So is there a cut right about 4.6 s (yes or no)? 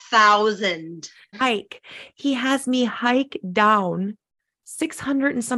no